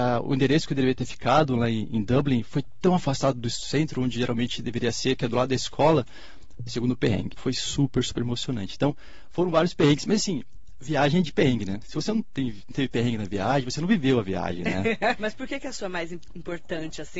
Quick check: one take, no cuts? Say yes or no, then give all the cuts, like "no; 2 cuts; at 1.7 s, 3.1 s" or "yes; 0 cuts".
no; 2 cuts; at 7.4 s, 15.2 s